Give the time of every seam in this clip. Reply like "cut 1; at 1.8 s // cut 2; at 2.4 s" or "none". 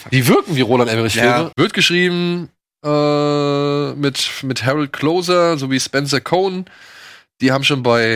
cut 1; at 1.5 s